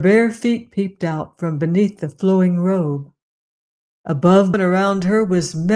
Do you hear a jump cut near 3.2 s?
no; 1 cut; at 4.5 s

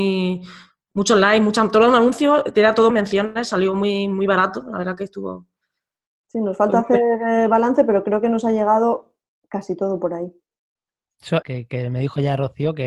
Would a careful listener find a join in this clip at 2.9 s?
yes; 2 cuts; at 2.9 s, 11.4 s

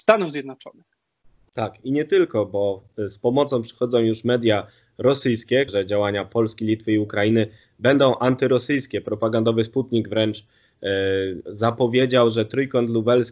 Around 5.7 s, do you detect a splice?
yes; 1 cut; at 5.7 s

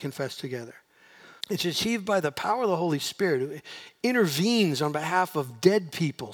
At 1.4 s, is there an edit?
yes; 1 cut; at 1.4 s

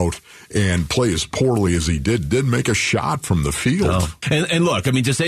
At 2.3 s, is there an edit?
no; 1 cut; at 4.2 s

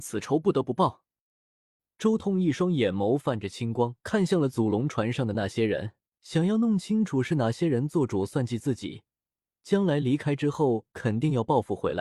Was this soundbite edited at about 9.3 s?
no; 2 cuts; at 4.0 s, 6.1 s

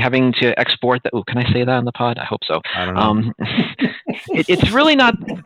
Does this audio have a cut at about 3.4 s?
no; 0 cuts

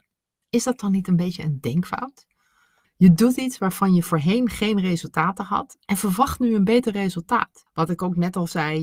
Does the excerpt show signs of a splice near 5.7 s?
no; 2 cuts; at 2.8 s, 7.7 s

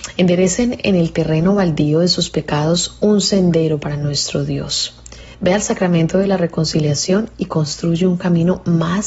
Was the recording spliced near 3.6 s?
no; 1 cut; at 5.3 s

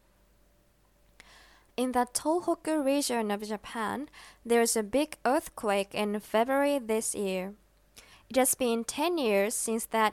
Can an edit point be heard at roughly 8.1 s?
yes; 1 cut; at 8.1 s

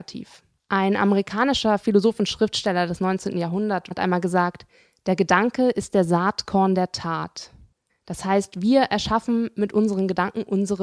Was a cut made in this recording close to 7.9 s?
yes; 2 cuts; at 3.9 s, 7.9 s

